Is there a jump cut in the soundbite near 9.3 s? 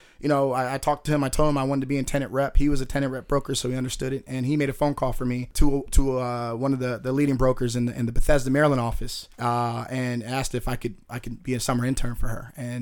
yes; 1 cut; at 9.3 s

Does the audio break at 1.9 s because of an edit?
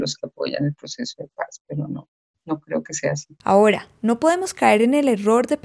no; 1 cut; at 3.4 s

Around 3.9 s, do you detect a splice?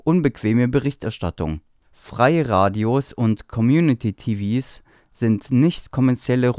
no; 1 cut; at 1.8 s

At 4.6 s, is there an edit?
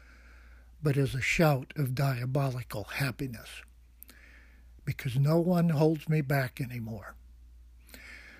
no; 0 cuts

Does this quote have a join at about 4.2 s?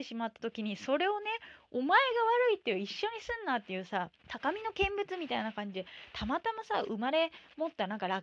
yes; 1 cut; at 4.2 s

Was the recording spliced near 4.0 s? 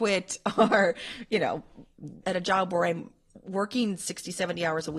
no; 1 cut; at 2.2 s

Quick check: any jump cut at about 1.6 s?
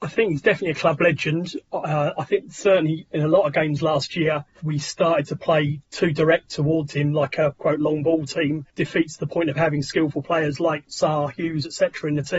no; 0 cuts

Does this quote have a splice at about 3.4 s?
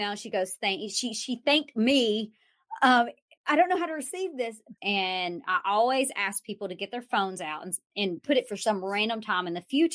yes; 2 cuts; at 3.4 s, 4.8 s

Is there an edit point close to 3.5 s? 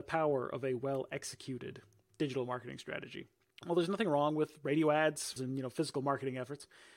no; 1 cut; at 5.4 s

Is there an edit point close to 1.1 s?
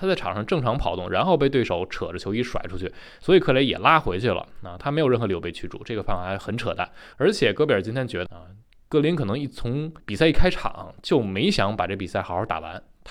no; 3 cuts; at 7.1 s, 8.3 s, 10.0 s

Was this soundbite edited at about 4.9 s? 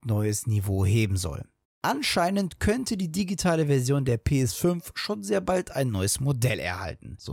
no; 1 cut; at 1.6 s

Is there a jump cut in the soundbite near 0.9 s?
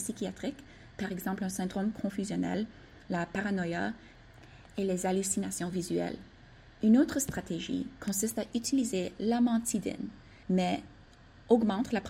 no; 2 cuts; at 6.8 s, 10.4 s

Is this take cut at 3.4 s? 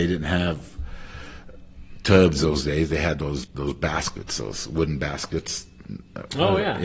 yes; 1 cut; at 3.4 s

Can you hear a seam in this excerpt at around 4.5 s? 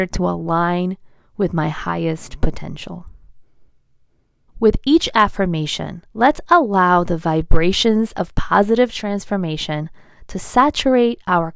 yes; 2 cuts; at 4.5 s, 6.1 s

